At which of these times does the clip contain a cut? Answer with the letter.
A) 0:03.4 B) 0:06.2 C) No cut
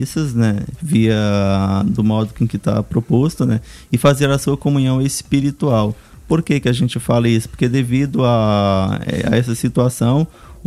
C